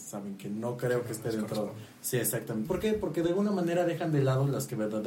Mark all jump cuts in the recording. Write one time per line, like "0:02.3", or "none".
0:02.6